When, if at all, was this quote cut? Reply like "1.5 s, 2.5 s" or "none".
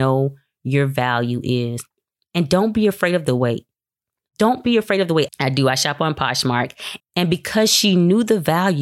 5.3 s, 7.0 s